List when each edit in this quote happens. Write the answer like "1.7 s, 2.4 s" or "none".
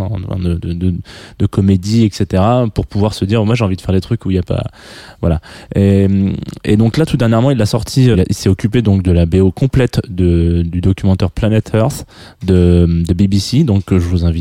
8.1 s